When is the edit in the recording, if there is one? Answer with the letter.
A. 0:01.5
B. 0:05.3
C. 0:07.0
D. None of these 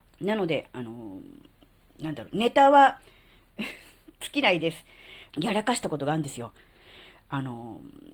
B